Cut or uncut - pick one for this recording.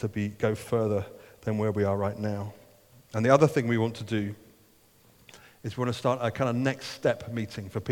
uncut